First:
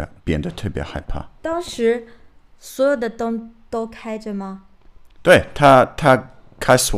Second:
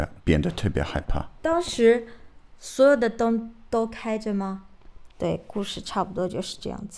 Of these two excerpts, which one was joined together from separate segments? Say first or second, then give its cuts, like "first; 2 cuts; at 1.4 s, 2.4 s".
second; 1 cut; at 5.1 s